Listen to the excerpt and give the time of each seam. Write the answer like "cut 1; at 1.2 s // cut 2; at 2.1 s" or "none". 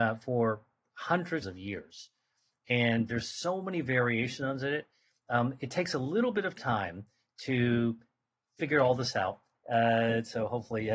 cut 1; at 1.4 s // cut 2; at 9.5 s